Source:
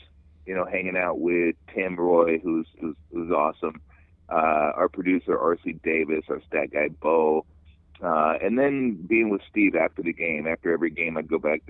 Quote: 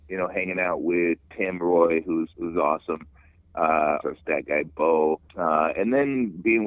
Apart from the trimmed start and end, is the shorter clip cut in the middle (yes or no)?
yes